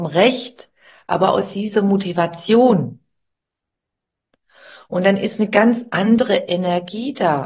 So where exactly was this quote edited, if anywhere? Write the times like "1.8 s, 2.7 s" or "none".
none